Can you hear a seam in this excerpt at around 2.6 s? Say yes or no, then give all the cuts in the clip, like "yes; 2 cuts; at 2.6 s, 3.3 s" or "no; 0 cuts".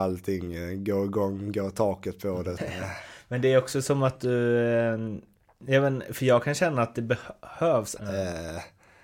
yes; 2 cuts; at 2.6 s, 8.0 s